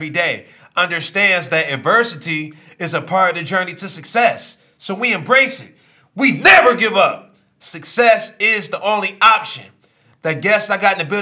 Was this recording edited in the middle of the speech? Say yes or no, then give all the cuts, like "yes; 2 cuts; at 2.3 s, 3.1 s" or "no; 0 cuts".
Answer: no; 0 cuts